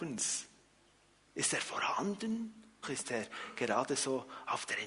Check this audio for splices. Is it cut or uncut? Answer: cut